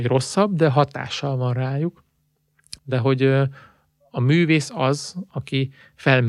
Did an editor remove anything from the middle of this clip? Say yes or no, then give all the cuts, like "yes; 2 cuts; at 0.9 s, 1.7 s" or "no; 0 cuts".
yes; 2 cuts; at 2.7 s, 5.3 s